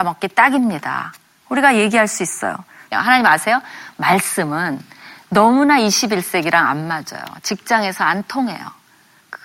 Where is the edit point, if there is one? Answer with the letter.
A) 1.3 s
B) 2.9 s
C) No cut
B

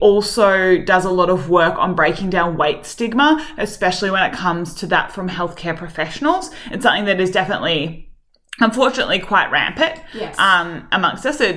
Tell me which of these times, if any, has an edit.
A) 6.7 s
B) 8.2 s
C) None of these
C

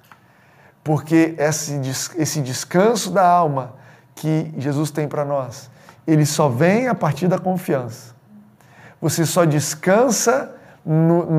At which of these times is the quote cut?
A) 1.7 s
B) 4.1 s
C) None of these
C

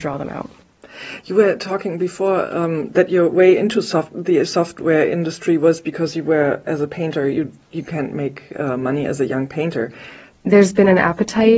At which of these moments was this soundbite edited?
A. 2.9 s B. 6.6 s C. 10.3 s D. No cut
C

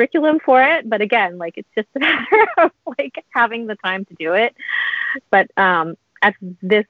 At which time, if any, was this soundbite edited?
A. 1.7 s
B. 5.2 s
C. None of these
B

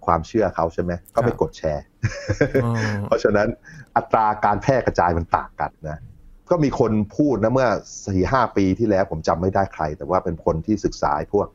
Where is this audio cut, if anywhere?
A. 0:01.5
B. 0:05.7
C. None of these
B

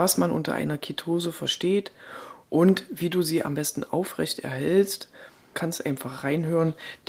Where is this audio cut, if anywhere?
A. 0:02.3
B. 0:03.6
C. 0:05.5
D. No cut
C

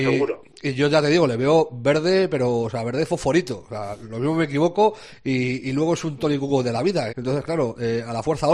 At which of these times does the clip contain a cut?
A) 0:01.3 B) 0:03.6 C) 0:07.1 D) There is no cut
C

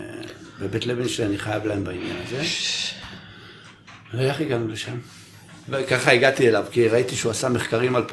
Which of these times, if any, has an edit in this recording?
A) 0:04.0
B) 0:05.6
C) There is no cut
B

